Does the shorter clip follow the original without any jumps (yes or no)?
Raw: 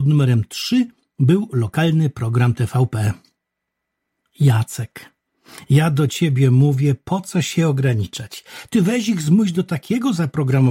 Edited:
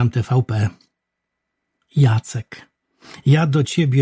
yes